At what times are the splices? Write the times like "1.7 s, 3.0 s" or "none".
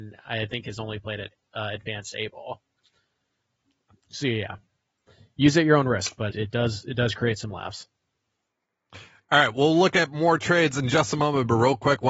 3.9 s, 6.3 s